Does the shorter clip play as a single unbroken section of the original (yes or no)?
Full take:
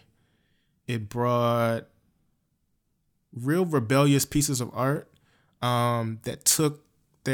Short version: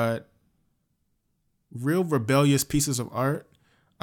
yes